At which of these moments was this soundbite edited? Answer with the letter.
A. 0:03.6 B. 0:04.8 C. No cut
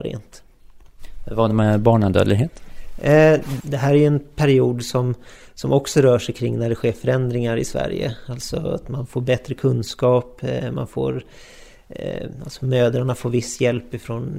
A